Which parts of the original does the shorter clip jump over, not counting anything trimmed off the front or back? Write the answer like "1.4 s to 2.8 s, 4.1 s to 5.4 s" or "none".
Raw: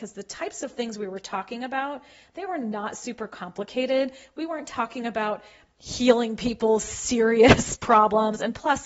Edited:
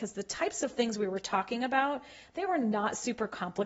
none